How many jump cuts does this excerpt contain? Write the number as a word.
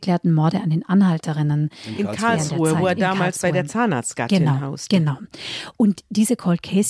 zero